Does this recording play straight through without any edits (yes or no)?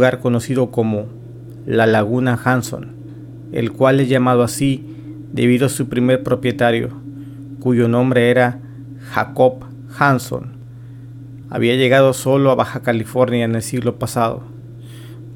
no